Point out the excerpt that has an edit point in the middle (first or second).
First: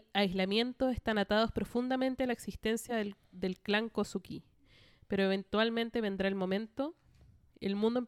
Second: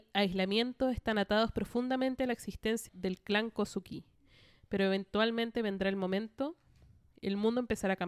second